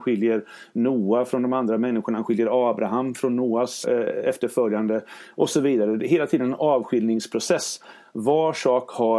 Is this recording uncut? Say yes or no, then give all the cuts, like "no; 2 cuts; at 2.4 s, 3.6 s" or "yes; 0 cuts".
no; 1 cut; at 3.8 s